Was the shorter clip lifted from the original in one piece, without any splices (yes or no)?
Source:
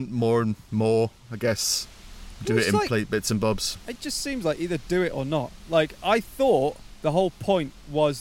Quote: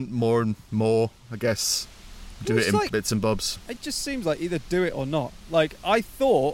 no